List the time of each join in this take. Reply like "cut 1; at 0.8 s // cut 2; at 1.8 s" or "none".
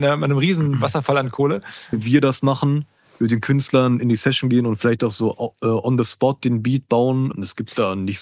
cut 1; at 1.9 s // cut 2; at 7.3 s